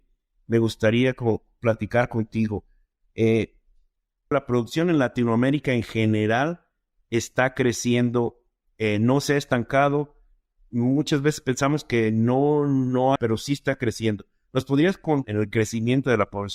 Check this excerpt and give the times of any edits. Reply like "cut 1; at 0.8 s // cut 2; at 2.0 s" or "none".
cut 1; at 4.3 s // cut 2; at 13.2 s // cut 3; at 15.2 s